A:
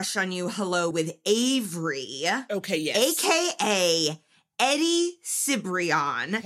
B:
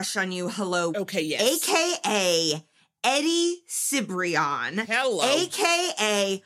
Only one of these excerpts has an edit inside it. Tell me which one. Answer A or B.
B